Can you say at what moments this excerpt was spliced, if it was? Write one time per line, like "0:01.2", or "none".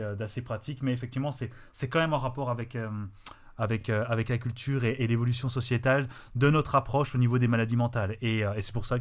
none